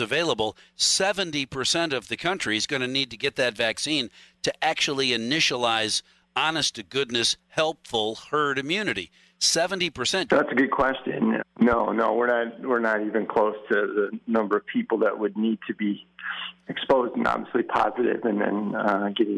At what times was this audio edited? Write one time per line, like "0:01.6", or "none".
0:10.3
0:11.4
0:16.7

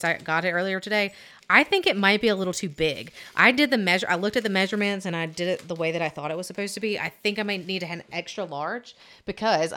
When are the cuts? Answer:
none

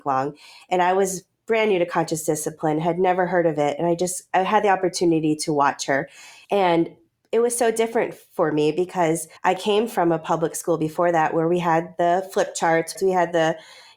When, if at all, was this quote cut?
0:06.4
0:09.4
0:12.9

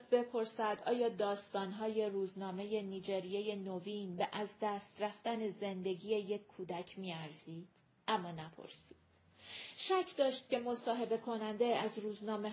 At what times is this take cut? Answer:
none

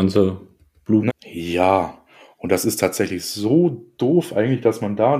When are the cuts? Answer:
0:01.1

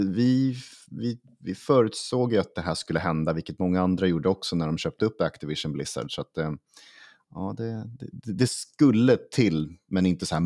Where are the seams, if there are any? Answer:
none

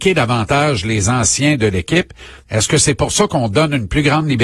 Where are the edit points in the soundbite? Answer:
0:02.4

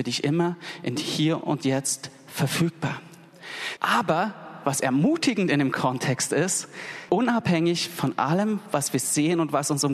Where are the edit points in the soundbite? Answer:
0:03.8
0:07.1

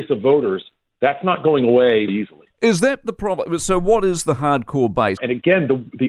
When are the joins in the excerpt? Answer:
0:02.1
0:05.2

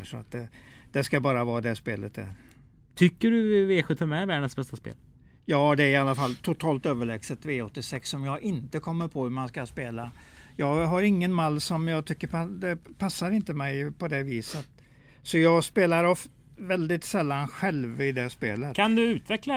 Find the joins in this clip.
none

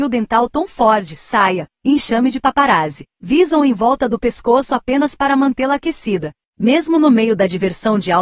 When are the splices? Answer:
0:01.7

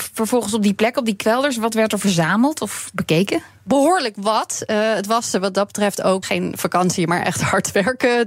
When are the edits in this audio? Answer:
0:06.2

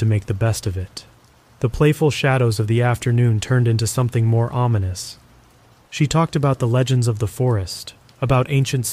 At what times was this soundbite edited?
0:01.5
0:05.8

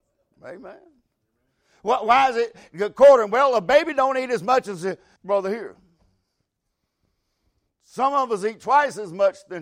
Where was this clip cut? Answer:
0:05.2

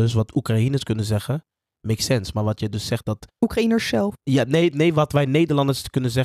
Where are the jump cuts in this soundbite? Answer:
none

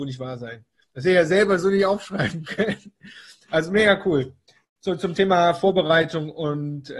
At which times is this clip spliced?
none

